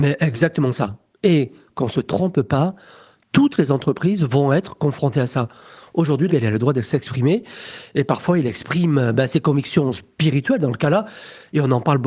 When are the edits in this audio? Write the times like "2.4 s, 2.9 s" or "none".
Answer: 6.3 s